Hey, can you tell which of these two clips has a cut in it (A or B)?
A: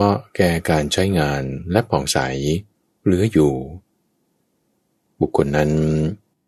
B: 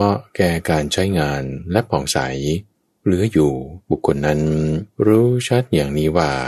B